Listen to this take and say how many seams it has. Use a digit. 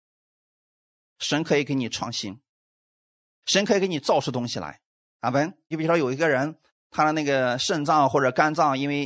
1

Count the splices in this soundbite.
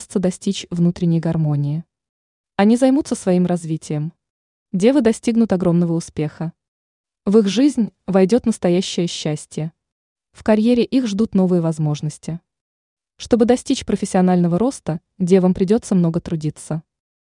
1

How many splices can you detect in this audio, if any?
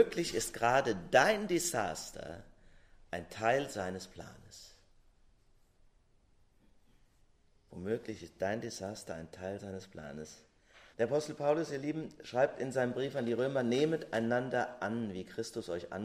1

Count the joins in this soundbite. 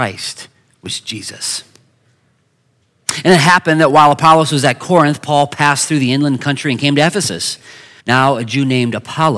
1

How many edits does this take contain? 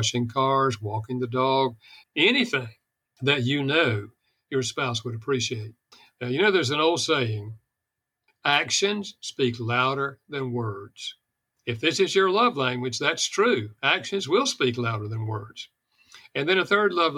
1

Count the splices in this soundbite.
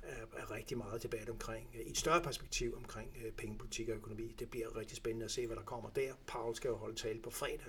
1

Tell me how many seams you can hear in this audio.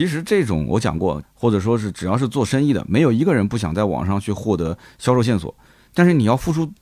1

